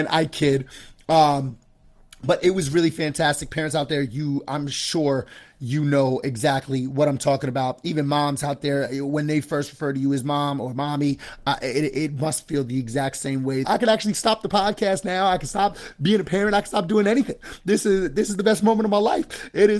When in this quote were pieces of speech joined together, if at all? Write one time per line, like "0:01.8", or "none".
0:13.6